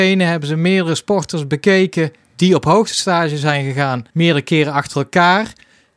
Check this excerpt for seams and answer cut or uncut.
cut